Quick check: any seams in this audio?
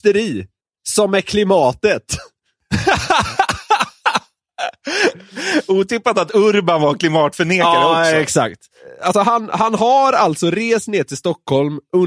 no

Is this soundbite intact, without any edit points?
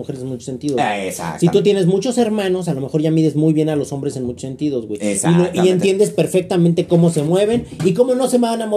yes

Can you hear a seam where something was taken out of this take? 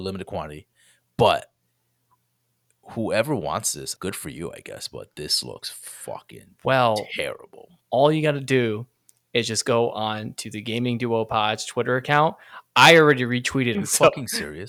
yes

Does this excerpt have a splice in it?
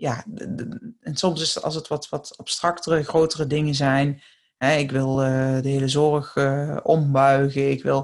no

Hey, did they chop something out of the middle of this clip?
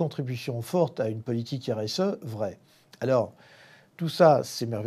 no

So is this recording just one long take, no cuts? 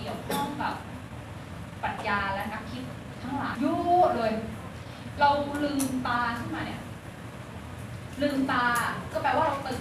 no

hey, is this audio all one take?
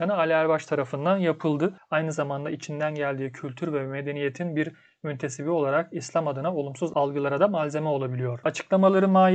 no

